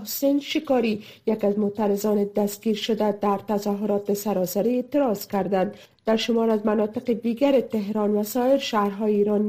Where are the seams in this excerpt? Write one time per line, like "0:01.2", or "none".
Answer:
none